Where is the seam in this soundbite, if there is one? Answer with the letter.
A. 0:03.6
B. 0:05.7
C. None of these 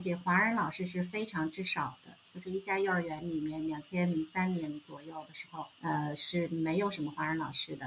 B